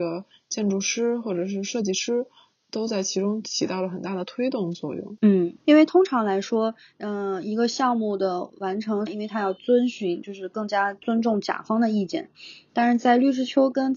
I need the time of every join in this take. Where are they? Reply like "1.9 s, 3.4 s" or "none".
5.6 s, 9.1 s